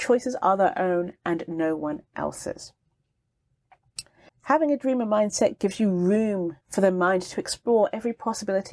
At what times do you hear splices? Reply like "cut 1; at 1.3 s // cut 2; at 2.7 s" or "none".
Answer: cut 1; at 4.3 s // cut 2; at 6.6 s